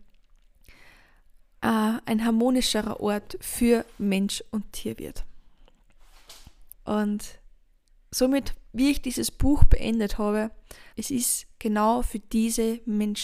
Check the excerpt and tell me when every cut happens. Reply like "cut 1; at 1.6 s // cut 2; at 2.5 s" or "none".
cut 1; at 6.7 s // cut 2; at 10.9 s